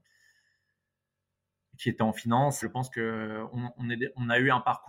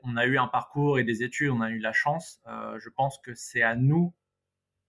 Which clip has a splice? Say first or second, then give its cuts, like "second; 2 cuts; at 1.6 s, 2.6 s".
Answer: first; 2 cuts; at 2.6 s, 3.8 s